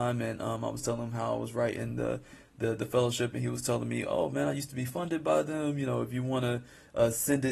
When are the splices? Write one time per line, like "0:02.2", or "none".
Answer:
none